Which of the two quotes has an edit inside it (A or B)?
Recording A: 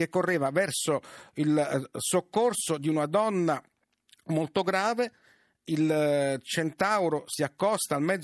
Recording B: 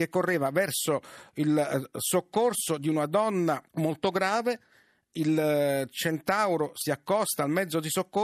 B